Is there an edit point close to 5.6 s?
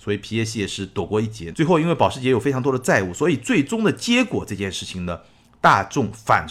no; 1 cut; at 1.5 s

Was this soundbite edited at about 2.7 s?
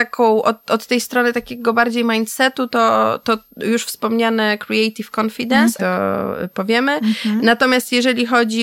no; 1 cut; at 5.8 s

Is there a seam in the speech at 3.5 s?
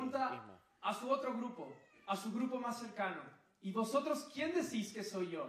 no; 0 cuts

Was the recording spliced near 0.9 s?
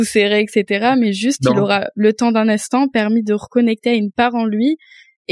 no; 0 cuts

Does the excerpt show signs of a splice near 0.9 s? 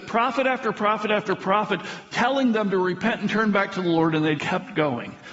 no; 1 cut; at 4.4 s

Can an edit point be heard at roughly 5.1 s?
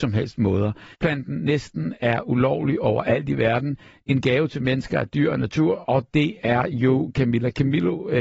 no; 1 cut; at 0.9 s

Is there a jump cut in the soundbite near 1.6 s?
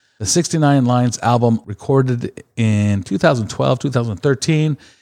yes; 1 cut; at 1.6 s

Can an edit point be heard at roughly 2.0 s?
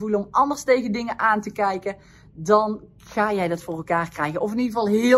no; 0 cuts

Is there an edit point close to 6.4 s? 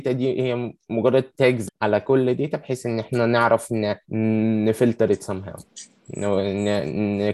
no; 2 cuts; at 1.7 s, 4.0 s

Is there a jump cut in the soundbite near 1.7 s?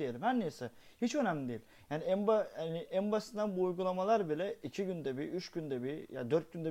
no; 0 cuts

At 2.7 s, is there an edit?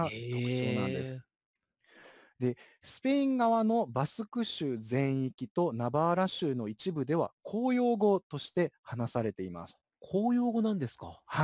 no; 0 cuts

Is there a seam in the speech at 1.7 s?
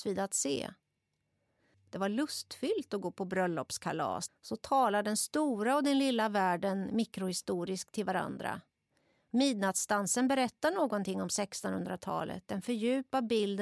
yes; 2 cuts; at 1.7 s, 4.3 s

